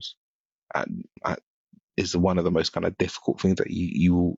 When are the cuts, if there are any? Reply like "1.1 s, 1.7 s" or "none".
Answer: none

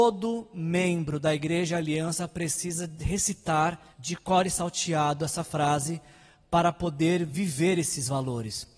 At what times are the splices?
3.9 s

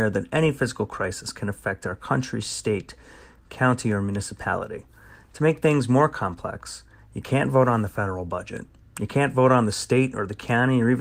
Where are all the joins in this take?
none

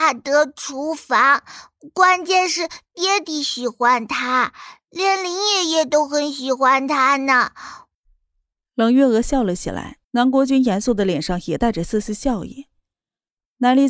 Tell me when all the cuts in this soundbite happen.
7.9 s, 10.0 s

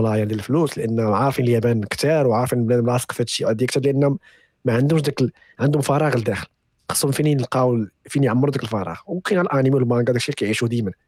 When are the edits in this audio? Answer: none

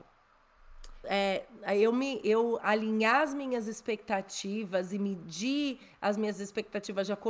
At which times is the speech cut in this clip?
1.0 s

